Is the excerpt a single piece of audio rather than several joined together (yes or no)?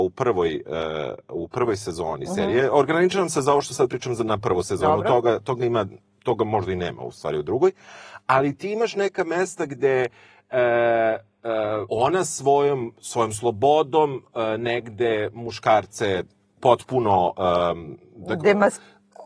no